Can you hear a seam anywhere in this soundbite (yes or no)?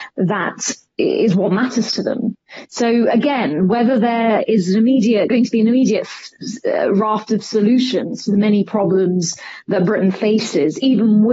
no